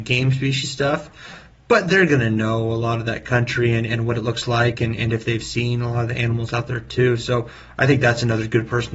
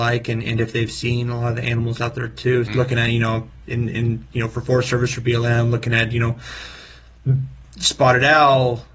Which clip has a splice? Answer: second; 2 cuts; at 2.7 s, 7.6 s

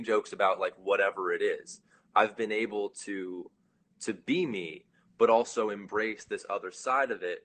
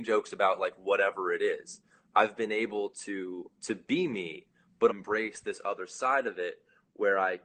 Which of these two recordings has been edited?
second; 2 cuts; at 3.6 s, 4.9 s

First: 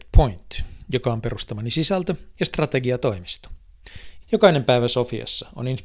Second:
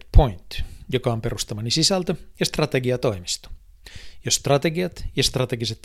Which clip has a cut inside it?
first; 1 cut; at 4.2 s

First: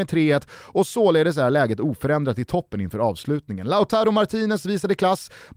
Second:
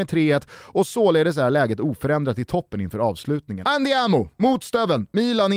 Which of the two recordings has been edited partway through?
second; 1 cut; at 3.6 s

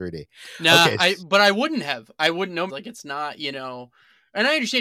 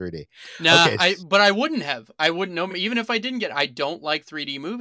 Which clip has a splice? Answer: first; 1 cut; at 2.7 s

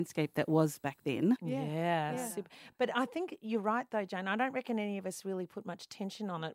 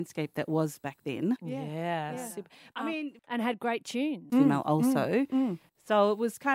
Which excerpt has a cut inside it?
second; 2 cuts; at 2.7 s, 4.3 s

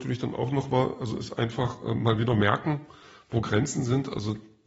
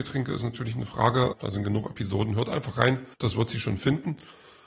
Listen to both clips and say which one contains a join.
second; 2 cuts; at 1.3 s, 3.1 s

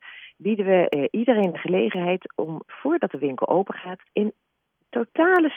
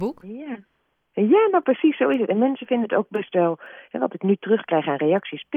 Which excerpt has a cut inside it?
first; 2 cuts; at 2.7 s, 4.1 s

